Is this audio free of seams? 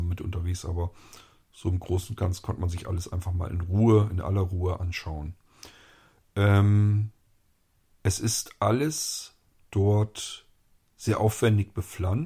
yes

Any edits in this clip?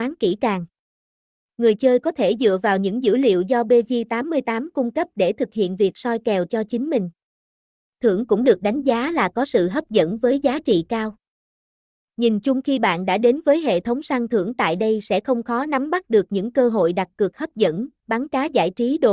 no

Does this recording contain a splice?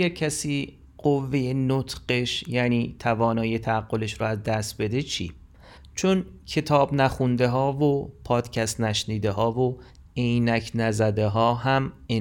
yes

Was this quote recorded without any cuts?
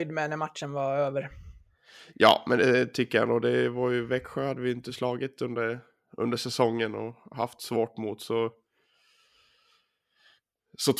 yes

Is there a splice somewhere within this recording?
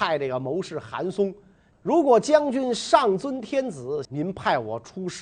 yes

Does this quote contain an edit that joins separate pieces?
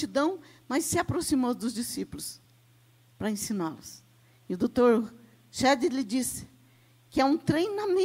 no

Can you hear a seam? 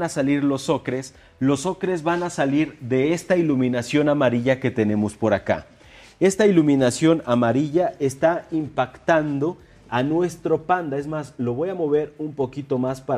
no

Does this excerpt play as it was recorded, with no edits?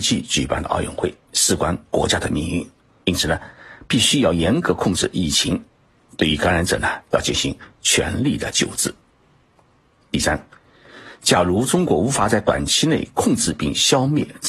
yes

